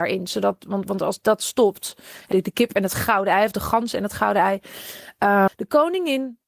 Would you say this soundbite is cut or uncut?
cut